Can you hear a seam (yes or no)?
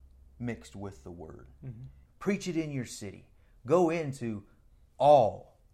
yes